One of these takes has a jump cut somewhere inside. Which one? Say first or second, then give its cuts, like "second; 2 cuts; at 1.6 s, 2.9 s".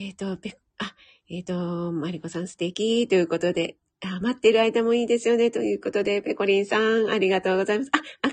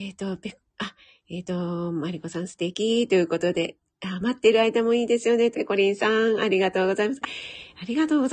second; 2 cuts; at 5.5 s, 7.2 s